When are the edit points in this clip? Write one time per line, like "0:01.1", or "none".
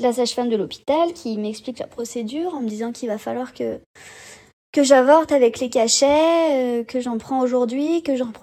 none